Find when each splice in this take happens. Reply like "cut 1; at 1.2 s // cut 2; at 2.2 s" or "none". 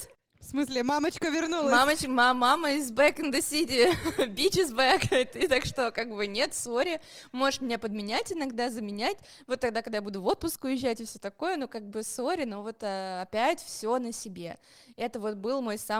none